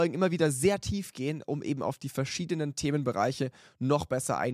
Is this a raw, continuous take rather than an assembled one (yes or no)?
yes